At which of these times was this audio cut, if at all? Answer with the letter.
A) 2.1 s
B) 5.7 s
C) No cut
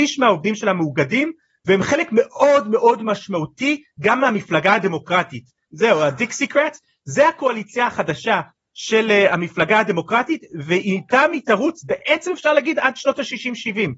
B